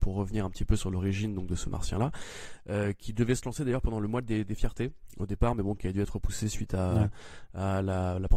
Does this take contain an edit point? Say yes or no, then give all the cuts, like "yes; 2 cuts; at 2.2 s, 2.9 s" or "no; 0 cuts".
no; 0 cuts